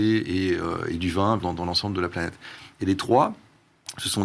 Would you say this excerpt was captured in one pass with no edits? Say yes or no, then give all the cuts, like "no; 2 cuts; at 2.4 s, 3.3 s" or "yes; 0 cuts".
no; 1 cut; at 1.4 s